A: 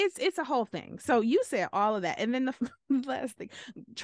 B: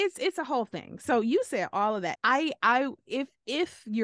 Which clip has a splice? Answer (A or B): B